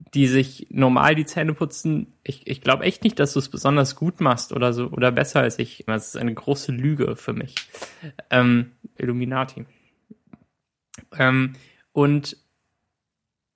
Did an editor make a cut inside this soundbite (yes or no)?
yes